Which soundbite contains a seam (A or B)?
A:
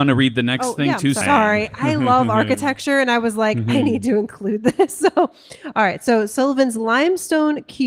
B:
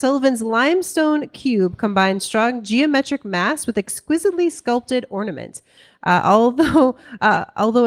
A